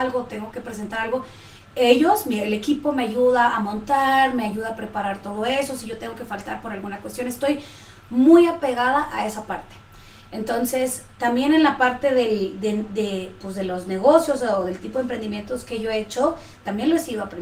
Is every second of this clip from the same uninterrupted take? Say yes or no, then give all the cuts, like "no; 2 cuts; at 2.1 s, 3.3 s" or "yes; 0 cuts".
yes; 0 cuts